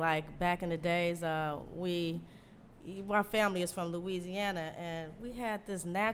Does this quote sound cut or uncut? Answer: uncut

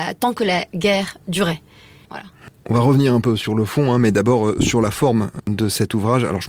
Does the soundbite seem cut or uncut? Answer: cut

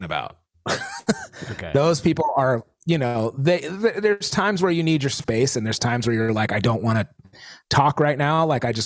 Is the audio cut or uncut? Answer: uncut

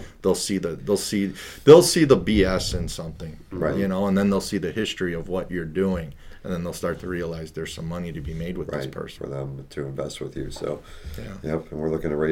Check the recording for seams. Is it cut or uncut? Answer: cut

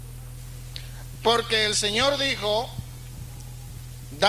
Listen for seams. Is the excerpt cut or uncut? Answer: cut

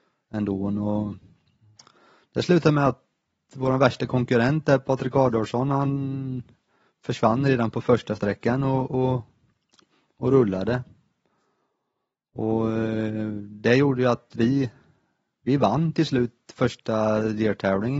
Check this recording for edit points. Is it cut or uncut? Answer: uncut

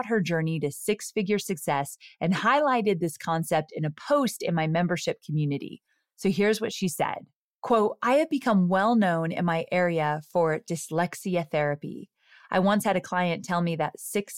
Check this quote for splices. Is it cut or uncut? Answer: uncut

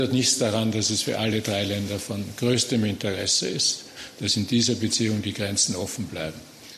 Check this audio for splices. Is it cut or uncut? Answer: uncut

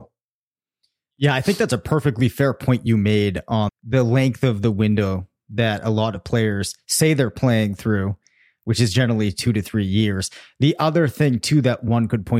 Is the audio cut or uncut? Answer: cut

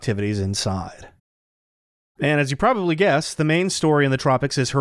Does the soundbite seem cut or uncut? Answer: uncut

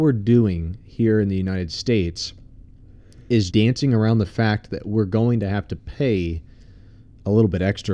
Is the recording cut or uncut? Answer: cut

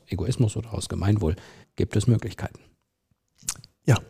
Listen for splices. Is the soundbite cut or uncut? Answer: cut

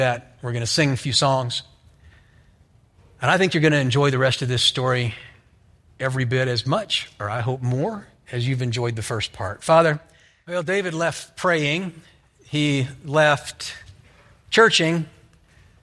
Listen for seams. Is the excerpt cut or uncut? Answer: uncut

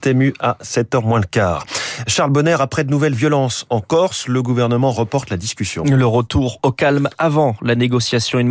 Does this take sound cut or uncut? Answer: uncut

